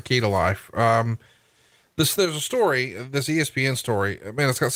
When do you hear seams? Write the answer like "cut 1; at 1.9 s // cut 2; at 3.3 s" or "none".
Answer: none